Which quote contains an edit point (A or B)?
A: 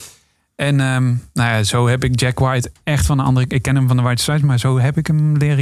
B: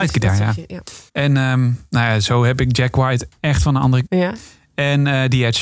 B